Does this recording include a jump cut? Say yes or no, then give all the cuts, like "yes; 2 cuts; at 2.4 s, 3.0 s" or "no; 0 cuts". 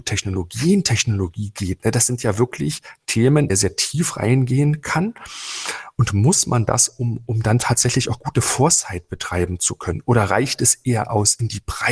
yes; 1 cut; at 3.5 s